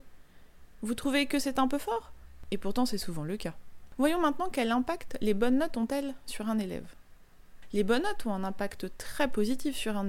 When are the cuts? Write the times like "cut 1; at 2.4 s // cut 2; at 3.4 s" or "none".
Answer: none